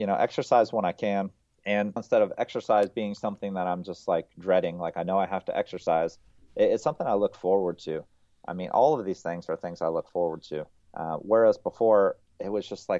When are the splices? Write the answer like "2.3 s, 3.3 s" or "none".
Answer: 2.0 s